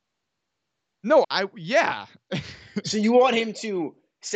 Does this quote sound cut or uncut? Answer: cut